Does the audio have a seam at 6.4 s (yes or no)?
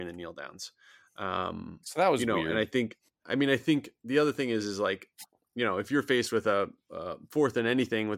no